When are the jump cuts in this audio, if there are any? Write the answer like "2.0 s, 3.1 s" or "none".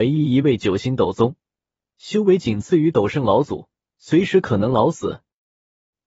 3.9 s